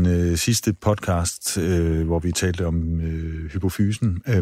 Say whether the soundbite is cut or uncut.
uncut